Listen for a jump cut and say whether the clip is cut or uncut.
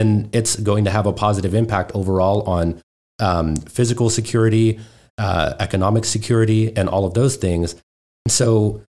uncut